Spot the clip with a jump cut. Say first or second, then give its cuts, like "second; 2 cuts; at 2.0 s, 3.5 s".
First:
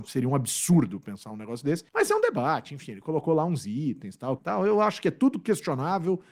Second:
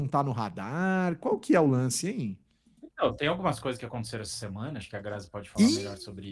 first; 2 cuts; at 1.9 s, 4.4 s